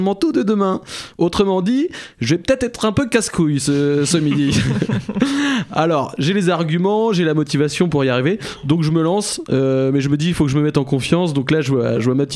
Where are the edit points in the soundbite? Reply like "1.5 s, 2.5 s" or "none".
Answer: none